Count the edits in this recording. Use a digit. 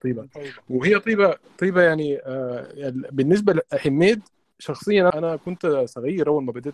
1